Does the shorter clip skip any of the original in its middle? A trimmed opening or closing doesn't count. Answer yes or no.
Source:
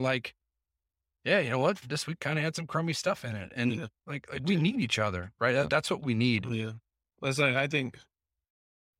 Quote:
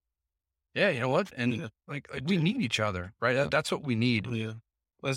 yes